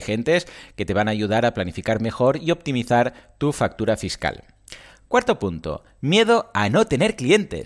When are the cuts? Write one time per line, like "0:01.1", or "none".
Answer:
none